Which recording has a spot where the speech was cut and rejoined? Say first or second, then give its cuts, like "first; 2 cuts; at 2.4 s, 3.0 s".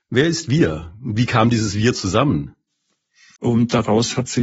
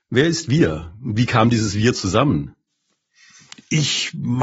first; 1 cut; at 3.4 s